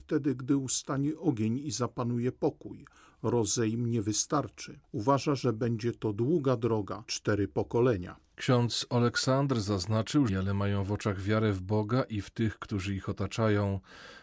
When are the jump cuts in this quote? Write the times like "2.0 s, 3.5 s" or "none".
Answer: 7.1 s, 10.3 s